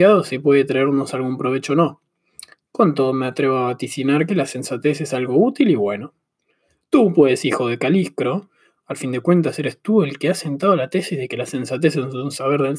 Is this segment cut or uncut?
uncut